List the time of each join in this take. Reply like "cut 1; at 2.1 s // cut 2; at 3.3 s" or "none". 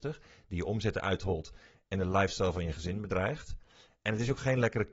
none